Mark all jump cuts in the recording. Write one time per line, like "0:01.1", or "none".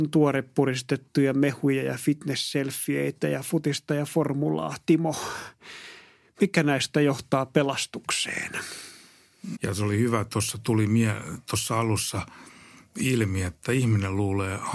0:09.6

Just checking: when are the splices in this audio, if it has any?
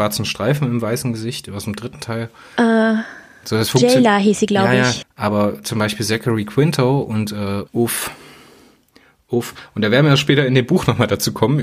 0:05.0
0:07.7

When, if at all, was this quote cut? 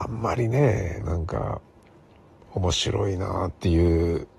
0:01.0

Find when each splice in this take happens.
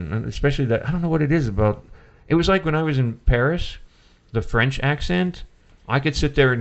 none

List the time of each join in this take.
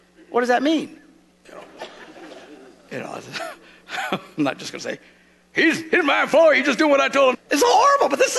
0:01.4
0:07.3

